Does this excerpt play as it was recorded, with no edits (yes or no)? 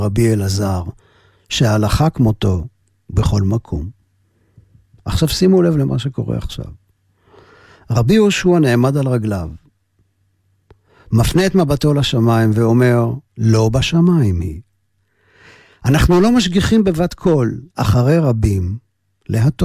no